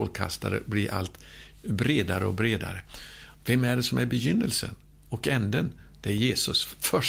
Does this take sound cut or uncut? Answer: cut